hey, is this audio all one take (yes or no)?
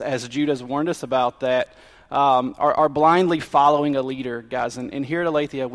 yes